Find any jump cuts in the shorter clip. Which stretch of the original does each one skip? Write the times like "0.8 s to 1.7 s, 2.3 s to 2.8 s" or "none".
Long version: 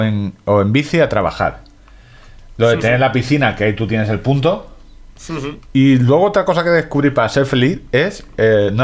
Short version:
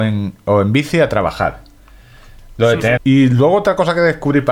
3.0 s to 5.7 s